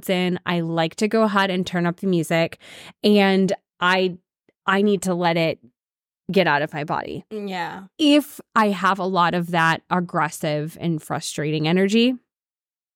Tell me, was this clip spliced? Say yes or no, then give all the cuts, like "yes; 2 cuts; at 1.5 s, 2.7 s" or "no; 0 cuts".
no; 0 cuts